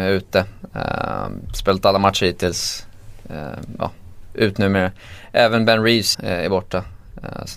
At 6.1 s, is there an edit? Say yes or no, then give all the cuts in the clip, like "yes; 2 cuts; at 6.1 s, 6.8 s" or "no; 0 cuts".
yes; 1 cut; at 6.1 s